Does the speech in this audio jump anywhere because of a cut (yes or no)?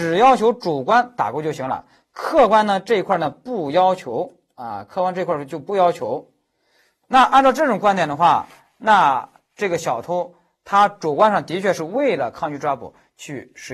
no